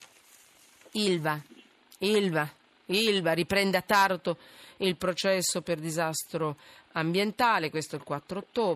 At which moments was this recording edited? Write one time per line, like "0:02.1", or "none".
none